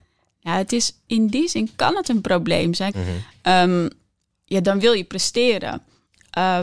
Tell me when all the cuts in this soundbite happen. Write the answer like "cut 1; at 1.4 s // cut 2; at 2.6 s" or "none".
cut 1; at 1.1 s // cut 2; at 2.9 s

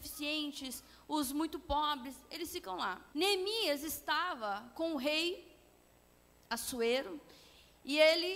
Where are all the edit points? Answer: cut 1; at 3.1 s

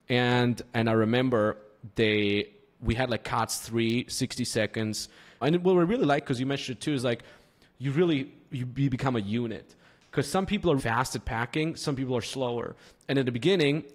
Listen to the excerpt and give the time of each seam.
cut 1; at 5.4 s // cut 2; at 10.8 s

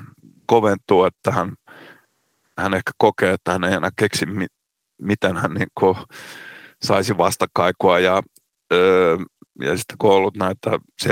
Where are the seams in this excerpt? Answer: none

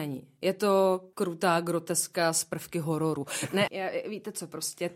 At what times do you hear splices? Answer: cut 1; at 1.1 s // cut 2; at 3.7 s

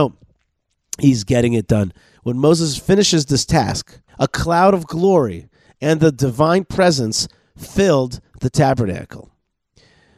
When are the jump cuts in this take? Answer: cut 1; at 2.1 s // cut 2; at 4.1 s

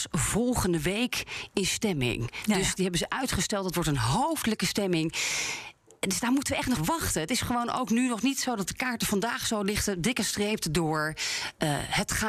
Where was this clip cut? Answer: cut 1; at 6.8 s

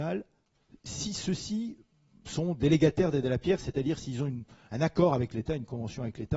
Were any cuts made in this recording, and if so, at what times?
none

